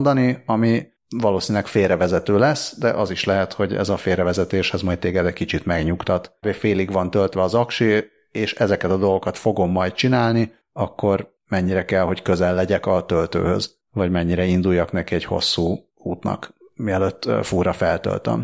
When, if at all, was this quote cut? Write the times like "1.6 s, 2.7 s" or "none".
6.4 s